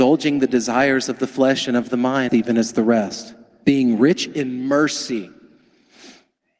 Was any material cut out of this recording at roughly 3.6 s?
yes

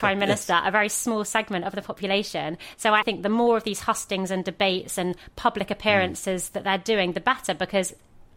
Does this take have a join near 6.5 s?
no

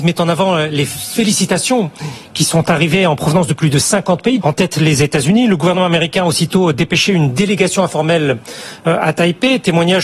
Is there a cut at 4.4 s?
yes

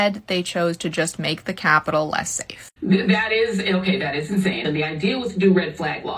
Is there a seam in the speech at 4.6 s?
yes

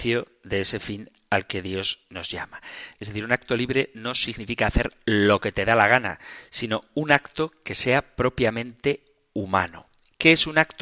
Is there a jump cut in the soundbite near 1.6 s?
no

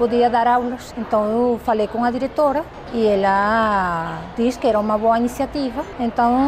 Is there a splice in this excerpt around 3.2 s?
no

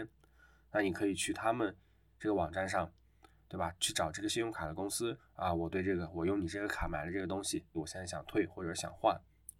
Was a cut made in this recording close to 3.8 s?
no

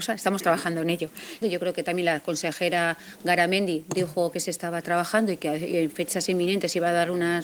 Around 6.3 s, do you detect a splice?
no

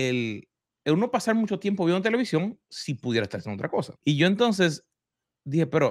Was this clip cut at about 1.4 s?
no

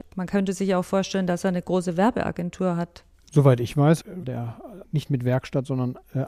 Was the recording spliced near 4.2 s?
yes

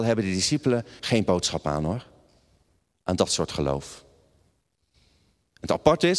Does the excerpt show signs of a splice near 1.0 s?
yes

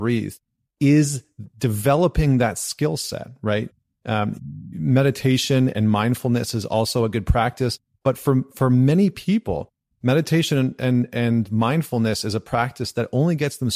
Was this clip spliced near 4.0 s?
no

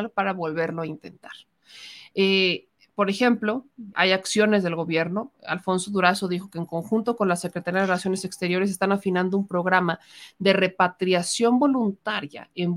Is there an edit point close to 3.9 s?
yes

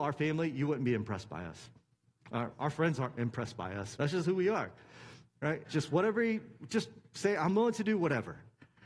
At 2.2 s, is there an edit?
no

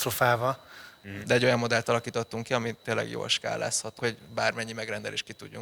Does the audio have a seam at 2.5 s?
no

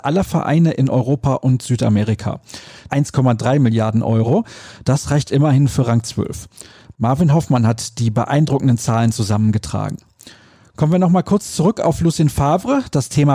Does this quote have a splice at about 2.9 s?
yes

